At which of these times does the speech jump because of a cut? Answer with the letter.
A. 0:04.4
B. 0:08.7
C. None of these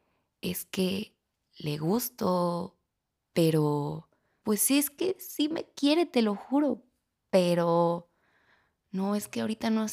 A